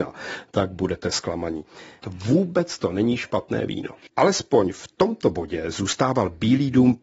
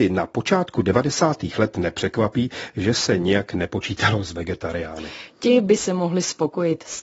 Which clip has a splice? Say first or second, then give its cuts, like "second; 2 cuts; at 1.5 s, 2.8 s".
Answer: first; 2 cuts; at 2.0 s, 4.1 s